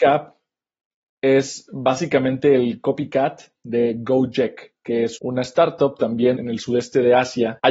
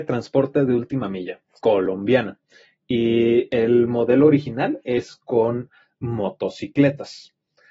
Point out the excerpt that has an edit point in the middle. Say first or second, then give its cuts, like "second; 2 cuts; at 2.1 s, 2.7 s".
first; 2 cuts; at 5.2 s, 6.4 s